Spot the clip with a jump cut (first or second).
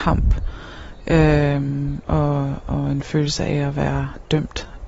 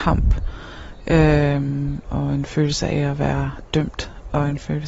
second